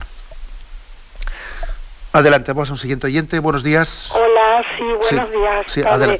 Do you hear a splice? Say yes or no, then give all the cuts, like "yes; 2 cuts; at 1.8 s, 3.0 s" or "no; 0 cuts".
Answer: no; 0 cuts